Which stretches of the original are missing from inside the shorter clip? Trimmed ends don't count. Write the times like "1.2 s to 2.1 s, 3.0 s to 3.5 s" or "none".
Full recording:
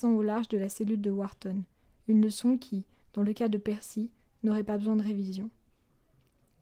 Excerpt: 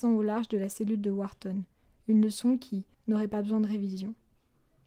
2.9 s to 4.3 s